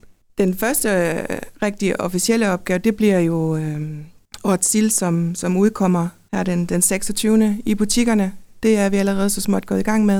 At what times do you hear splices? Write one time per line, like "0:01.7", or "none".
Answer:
none